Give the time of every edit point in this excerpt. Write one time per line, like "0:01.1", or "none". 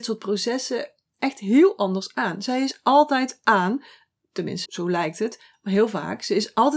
0:04.7

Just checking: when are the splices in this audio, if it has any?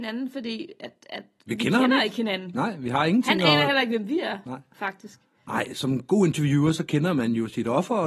none

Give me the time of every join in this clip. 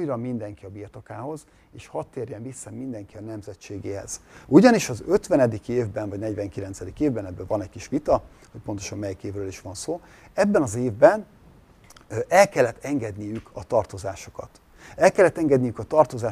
none

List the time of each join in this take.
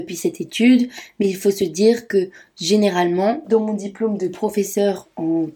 0:03.4

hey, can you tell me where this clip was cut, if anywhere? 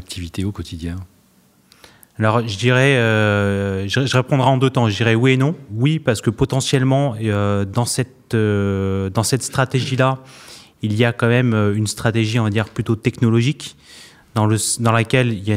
none

